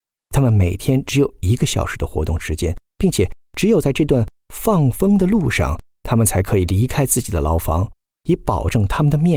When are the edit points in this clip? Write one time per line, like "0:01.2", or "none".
0:08.1